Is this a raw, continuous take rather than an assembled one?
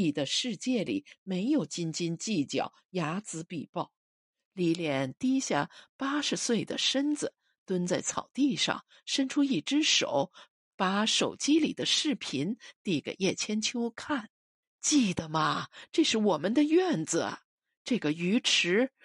no; 2 cuts; at 4.4 s, 14.6 s

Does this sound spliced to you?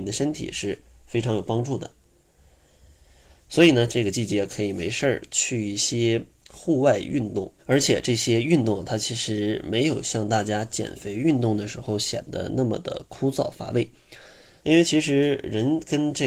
yes; 3 cuts; at 3.9 s, 7.6 s, 14.6 s

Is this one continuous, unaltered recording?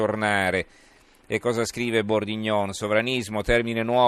yes; 0 cuts

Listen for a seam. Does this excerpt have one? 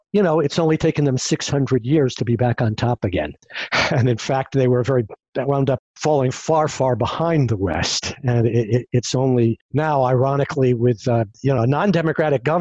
no; 0 cuts

